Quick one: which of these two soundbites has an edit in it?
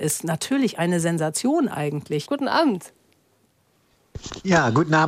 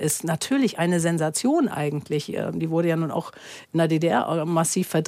first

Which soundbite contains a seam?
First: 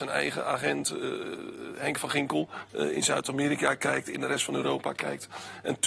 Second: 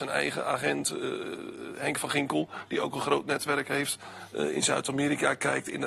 first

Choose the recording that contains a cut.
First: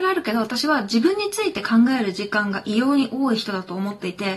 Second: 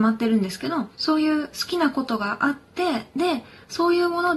second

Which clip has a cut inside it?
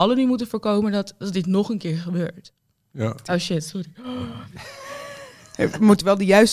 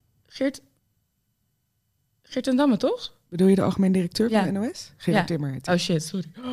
first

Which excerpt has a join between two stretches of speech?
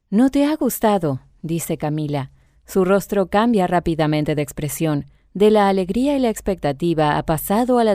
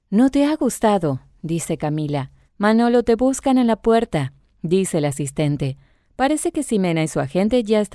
second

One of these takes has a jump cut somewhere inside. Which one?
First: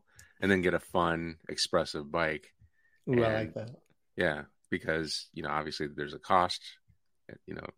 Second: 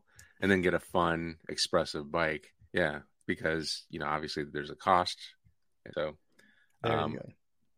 second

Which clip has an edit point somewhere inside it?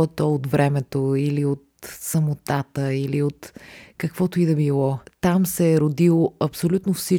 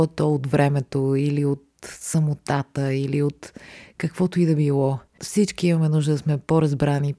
first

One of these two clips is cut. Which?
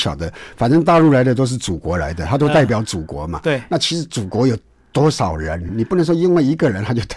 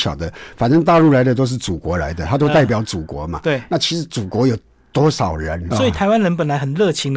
second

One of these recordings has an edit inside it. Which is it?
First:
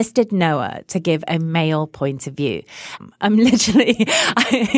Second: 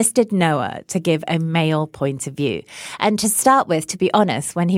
first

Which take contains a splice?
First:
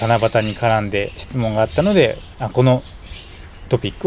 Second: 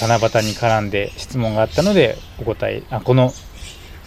first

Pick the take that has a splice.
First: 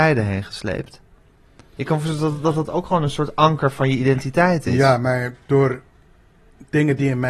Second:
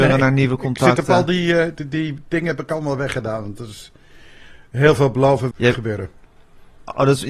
second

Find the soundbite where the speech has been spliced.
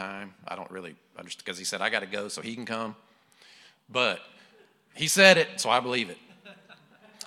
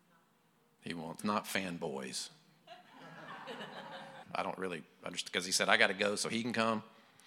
second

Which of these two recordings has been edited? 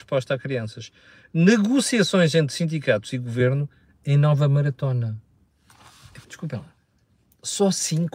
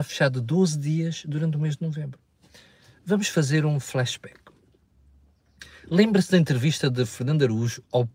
first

